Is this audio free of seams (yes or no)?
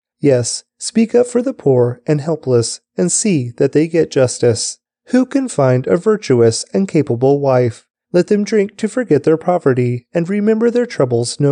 no